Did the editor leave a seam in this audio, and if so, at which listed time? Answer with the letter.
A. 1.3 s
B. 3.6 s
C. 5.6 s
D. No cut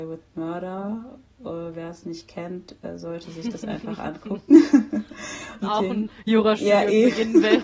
C